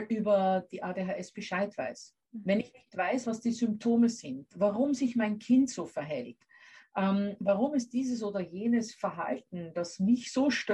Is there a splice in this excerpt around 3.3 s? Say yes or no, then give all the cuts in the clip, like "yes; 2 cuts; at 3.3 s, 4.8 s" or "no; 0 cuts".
no; 0 cuts